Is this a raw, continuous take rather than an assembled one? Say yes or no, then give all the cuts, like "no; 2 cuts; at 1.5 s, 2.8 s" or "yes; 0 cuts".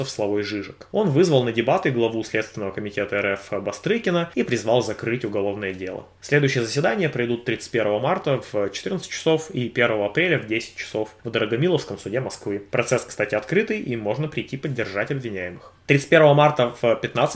yes; 0 cuts